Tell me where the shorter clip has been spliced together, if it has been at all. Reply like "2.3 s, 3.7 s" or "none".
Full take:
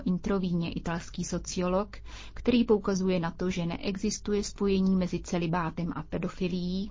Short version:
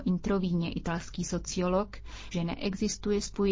2.3 s